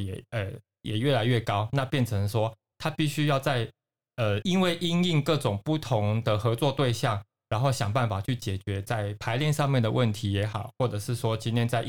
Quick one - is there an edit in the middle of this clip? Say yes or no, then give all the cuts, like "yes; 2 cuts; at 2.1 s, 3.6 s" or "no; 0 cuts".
yes; 2 cuts; at 2.7 s, 4.4 s